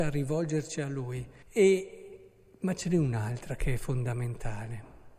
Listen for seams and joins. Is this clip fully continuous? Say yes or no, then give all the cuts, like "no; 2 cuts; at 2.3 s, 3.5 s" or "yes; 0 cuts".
no; 1 cut; at 1.4 s